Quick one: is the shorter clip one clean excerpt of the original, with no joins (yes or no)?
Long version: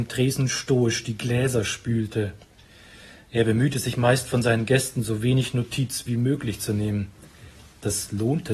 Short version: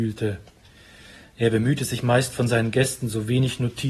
yes